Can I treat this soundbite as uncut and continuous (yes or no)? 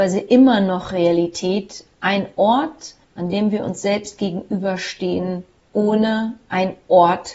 yes